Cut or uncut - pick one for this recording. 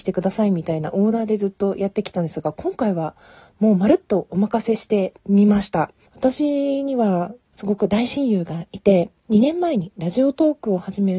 cut